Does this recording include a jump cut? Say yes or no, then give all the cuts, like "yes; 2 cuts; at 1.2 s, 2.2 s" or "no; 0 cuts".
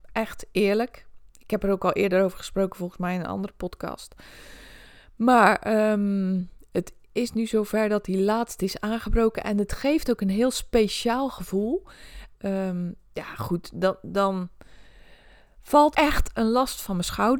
yes; 2 cuts; at 12.3 s, 15.9 s